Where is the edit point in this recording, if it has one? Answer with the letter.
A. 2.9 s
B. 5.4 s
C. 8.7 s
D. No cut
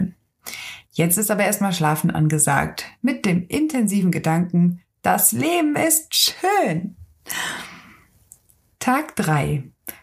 D